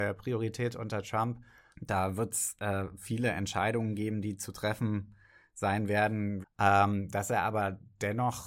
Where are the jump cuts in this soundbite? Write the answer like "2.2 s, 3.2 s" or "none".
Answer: 1.7 s, 6.4 s